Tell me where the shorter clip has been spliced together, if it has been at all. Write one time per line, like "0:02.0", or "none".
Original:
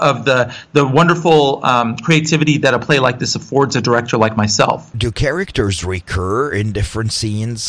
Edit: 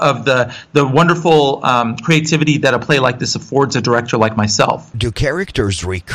none